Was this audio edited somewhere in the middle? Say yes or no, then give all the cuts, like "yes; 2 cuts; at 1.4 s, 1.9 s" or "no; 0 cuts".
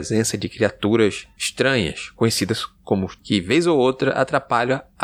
yes; 1 cut; at 3.2 s